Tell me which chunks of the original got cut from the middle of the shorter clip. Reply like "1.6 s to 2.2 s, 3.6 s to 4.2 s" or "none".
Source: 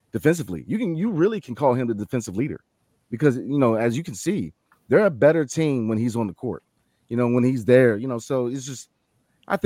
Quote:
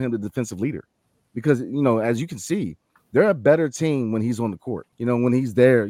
6.7 s to 7.0 s